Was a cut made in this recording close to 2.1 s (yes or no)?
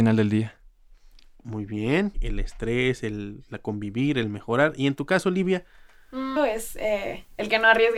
yes